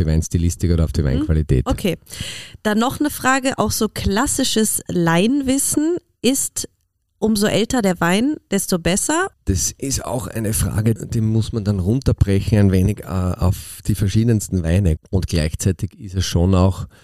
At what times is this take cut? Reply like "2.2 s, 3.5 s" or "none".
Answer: 9.3 s, 11.0 s, 15.0 s

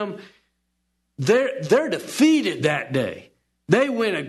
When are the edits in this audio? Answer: none

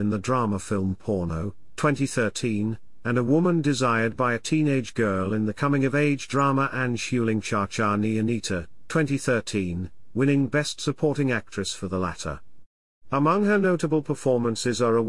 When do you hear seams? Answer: none

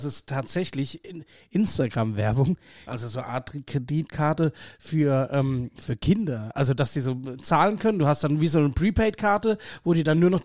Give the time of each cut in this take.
2.9 s

